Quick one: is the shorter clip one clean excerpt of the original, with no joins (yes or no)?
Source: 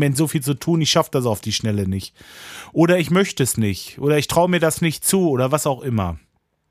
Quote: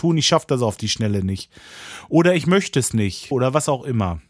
no